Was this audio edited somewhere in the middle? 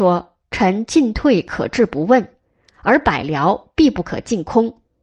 no; 0 cuts

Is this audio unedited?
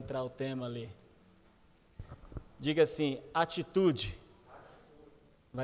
yes; 0 cuts

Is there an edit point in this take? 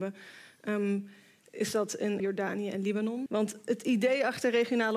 yes; 2 cuts; at 2.2 s, 3.3 s

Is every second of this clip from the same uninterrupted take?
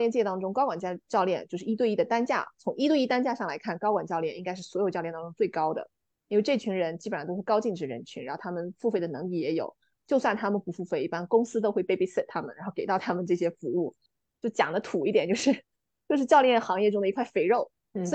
yes; 0 cuts

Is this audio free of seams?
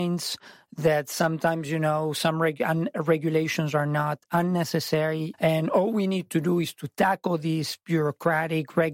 no; 1 cut; at 5.3 s

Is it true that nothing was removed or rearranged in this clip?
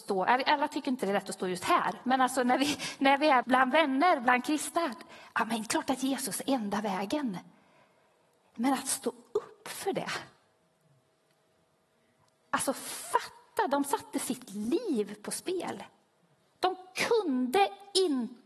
no; 1 cut; at 3.4 s

